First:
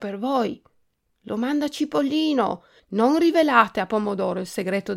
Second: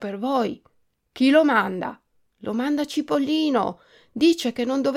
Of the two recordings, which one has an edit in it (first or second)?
first